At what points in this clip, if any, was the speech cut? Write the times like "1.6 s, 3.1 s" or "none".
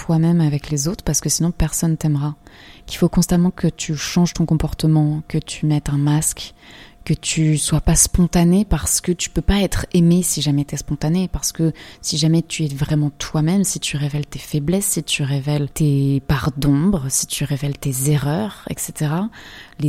none